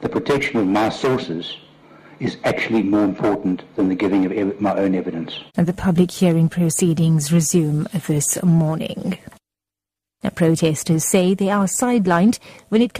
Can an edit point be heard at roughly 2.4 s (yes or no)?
no